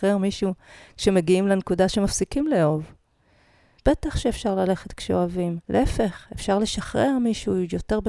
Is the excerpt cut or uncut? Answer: cut